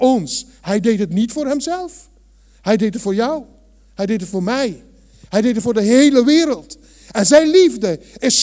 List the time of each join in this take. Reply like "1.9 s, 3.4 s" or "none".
none